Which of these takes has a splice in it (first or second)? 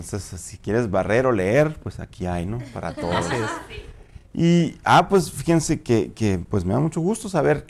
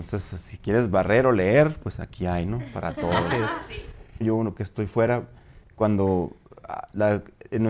second